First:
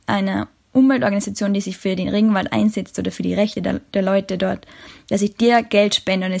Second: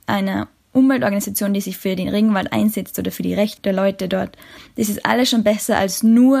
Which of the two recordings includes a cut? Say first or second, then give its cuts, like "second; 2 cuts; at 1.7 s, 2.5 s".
second; 2 cuts; at 3.6 s, 4.7 s